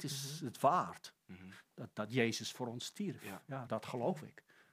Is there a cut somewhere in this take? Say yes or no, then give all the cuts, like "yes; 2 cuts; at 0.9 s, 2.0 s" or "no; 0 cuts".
yes; 1 cut; at 3.7 s